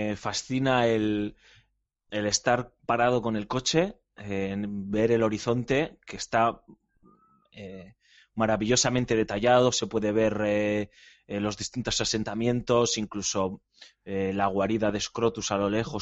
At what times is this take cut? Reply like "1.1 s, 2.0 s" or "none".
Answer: none